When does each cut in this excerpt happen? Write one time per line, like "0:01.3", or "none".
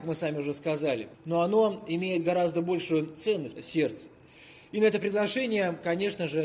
0:01.1
0:03.6